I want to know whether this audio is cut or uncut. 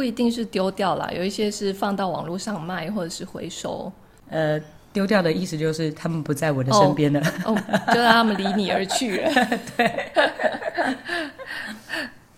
uncut